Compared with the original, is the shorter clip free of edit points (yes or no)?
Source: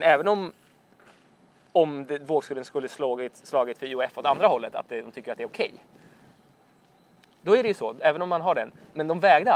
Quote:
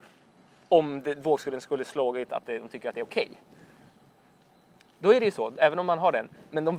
no